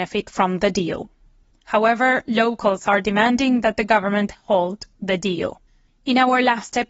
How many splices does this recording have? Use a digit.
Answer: 2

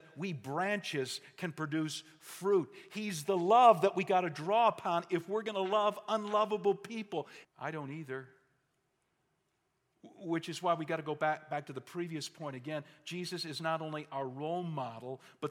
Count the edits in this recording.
1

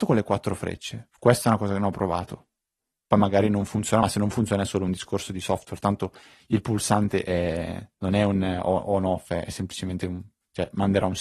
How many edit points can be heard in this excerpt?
0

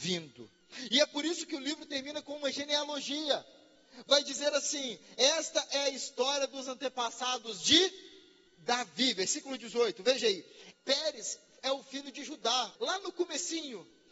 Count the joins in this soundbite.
2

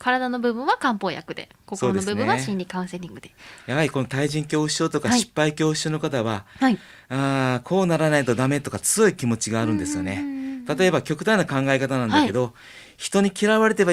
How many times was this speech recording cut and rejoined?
0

